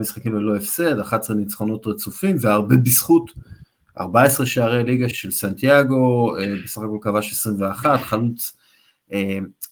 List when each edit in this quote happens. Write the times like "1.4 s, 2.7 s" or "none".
5.1 s